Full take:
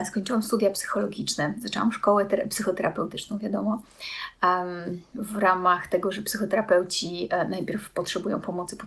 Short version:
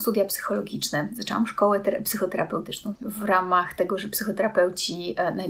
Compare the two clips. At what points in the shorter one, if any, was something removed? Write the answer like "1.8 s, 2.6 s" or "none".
2.9 s